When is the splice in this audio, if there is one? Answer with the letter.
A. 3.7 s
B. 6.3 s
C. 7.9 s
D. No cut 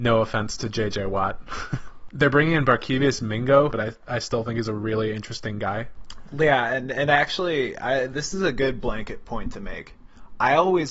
A